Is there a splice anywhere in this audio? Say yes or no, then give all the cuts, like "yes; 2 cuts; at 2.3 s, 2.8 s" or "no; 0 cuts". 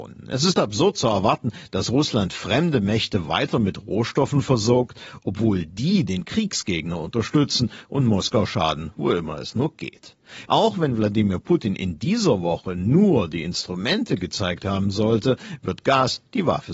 yes; 1 cut; at 10.5 s